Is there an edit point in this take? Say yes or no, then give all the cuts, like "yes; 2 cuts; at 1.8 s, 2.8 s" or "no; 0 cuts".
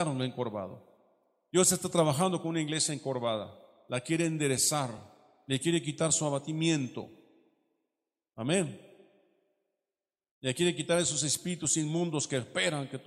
no; 0 cuts